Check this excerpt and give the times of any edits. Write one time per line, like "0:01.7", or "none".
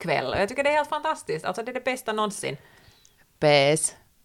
none